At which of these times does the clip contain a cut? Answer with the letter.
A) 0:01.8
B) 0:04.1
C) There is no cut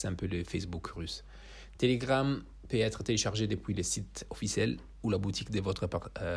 C